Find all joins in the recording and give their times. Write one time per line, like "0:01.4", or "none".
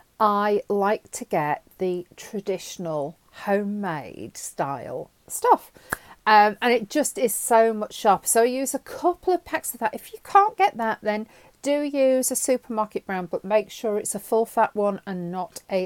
none